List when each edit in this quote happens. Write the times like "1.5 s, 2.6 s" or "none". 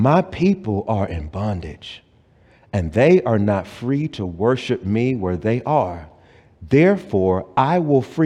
none